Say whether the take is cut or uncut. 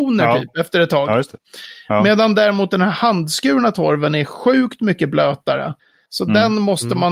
uncut